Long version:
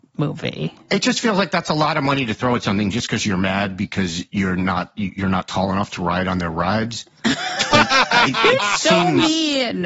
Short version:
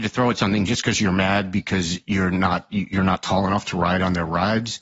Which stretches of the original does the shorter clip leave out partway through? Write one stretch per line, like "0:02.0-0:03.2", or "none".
none